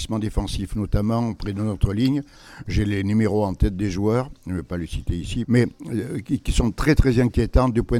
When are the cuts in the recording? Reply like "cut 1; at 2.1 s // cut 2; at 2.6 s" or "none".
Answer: cut 1; at 5.4 s